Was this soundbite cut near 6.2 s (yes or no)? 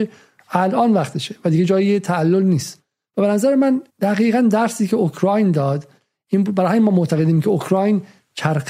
no